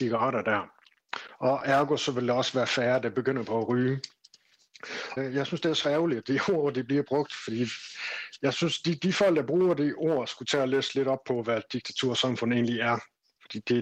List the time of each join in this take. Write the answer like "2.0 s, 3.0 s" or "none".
5.2 s

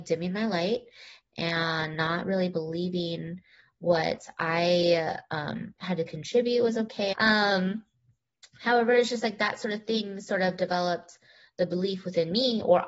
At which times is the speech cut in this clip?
7.1 s

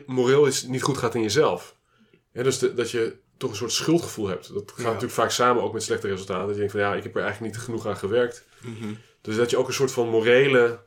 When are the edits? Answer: none

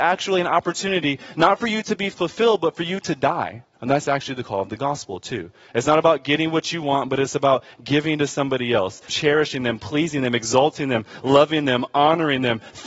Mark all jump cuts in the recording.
3.7 s, 9.1 s

